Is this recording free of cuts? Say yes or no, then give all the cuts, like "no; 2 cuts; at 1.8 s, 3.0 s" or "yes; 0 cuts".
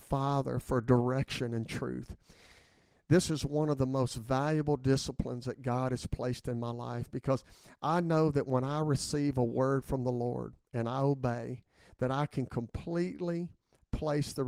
yes; 0 cuts